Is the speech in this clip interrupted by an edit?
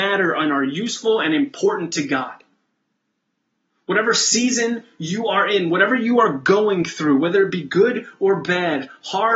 no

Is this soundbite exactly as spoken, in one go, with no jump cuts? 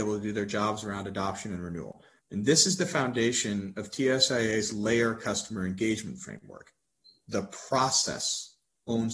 no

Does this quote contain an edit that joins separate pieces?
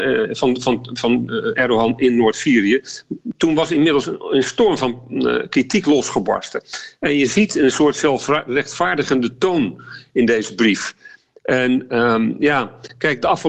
no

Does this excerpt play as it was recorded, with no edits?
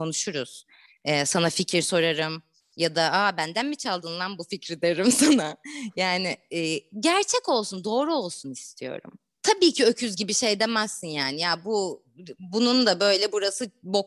yes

